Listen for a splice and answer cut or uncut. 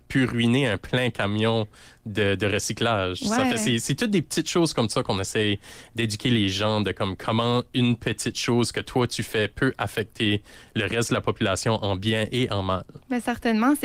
uncut